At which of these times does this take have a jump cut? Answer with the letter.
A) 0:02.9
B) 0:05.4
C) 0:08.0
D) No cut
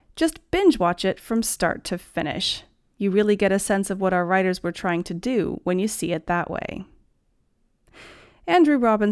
D